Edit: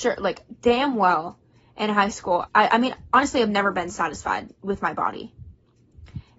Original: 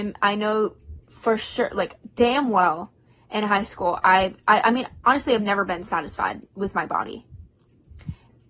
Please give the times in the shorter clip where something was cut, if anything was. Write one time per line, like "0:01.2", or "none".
0:02.5

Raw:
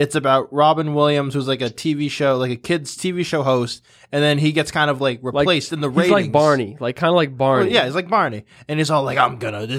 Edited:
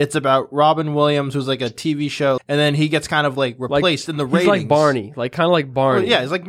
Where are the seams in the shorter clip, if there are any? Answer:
0:02.4

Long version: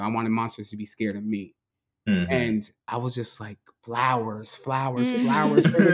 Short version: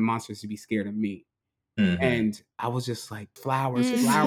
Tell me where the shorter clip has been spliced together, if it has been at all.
0:03.4

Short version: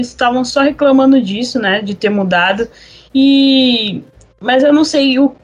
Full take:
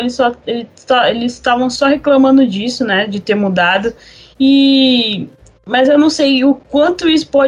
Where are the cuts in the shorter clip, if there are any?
none

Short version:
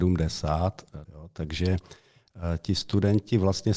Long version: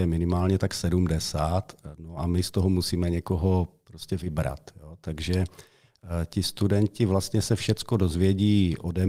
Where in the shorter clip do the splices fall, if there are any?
0:01.0

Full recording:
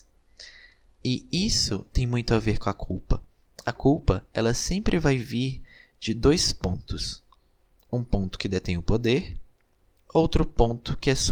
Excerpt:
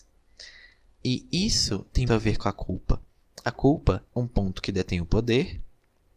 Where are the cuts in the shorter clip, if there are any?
0:02.1
0:04.1

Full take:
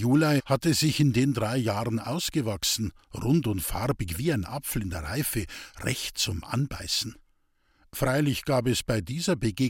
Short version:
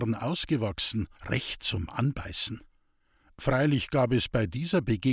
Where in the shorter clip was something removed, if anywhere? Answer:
0:01.2

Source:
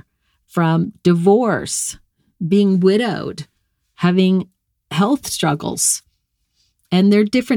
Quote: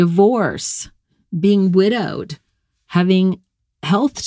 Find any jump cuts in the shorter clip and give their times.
none

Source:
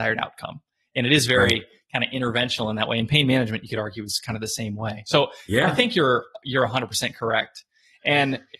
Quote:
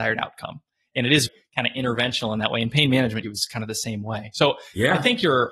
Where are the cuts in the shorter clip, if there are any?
0:01.3
0:03.2

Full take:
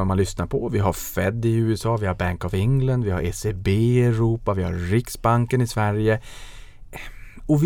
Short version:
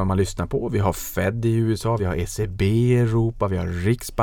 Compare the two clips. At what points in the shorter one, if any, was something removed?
0:02.0

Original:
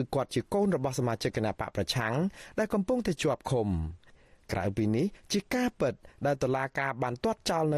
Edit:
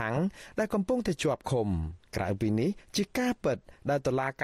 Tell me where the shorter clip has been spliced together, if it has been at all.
0:02.1

